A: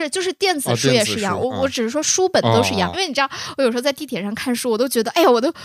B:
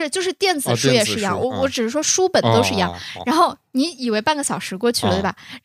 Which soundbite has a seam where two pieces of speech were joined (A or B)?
A